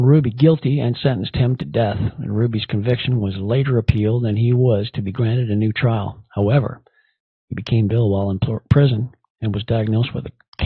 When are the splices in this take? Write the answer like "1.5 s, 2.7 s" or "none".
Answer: 7.9 s